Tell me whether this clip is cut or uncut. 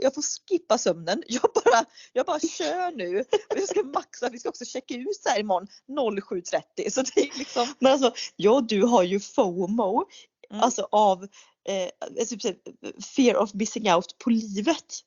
uncut